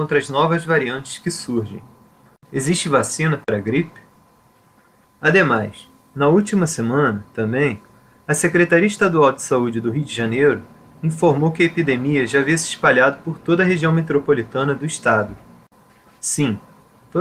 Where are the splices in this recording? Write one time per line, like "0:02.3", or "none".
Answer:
0:02.4
0:05.0
0:16.2